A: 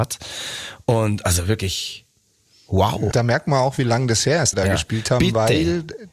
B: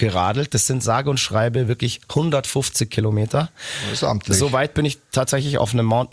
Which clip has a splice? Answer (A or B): A